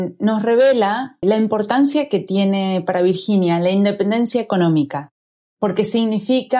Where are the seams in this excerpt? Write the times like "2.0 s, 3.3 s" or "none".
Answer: 1.2 s